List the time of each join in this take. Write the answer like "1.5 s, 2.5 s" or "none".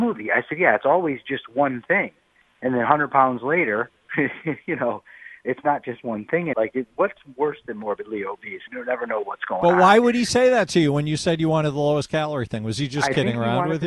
6.5 s, 8.7 s

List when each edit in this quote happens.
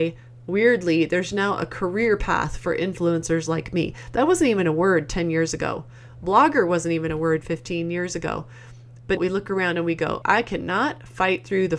9.2 s, 10.2 s

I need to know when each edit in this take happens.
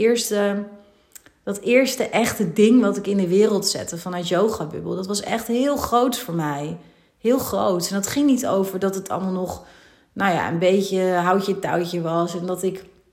none

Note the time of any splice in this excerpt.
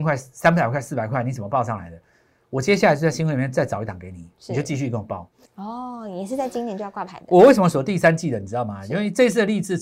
5.4 s

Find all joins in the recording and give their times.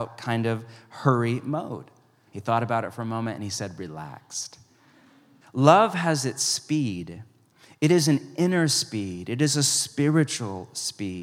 2.3 s, 5.4 s

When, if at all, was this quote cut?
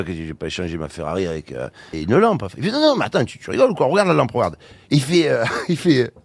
1.9 s, 4.9 s

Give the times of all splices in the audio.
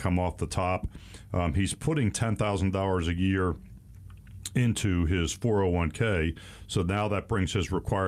none

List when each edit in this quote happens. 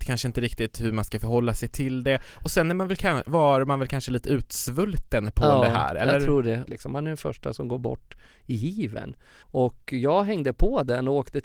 6.7 s, 9.4 s

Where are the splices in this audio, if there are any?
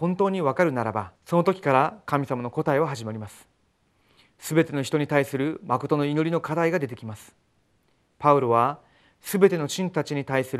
1.2 s

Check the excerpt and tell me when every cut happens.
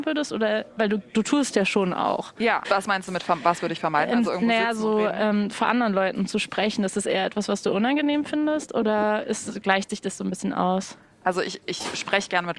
2.6 s

